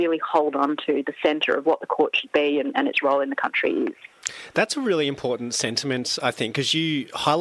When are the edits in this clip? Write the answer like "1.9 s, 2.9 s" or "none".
6.2 s